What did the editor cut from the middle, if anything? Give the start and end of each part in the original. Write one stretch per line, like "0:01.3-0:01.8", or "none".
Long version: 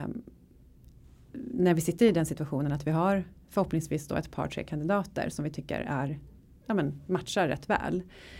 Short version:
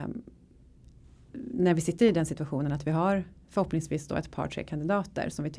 none